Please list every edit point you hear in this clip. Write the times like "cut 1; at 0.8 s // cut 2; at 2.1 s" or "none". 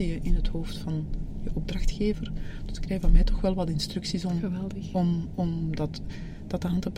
none

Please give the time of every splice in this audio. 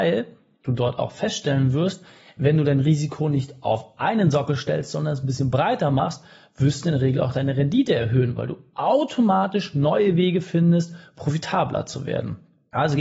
none

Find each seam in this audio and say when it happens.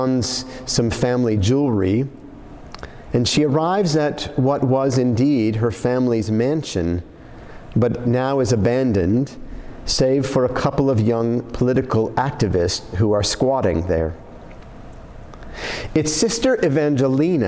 none

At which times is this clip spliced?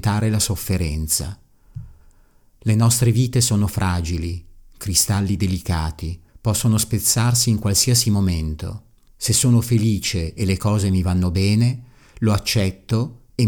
cut 1; at 6.3 s // cut 2; at 9.1 s

